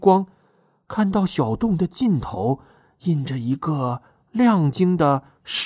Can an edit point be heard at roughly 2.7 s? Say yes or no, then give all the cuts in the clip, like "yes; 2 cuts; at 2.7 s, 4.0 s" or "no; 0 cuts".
no; 1 cut; at 4.7 s